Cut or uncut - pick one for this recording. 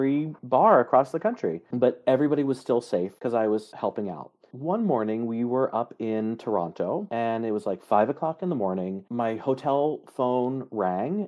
uncut